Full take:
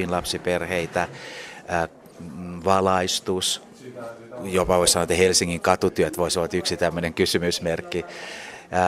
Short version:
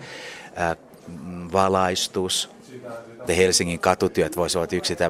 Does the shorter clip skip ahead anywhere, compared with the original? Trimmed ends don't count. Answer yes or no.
yes